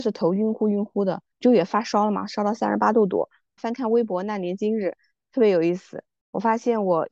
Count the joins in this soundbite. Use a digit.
2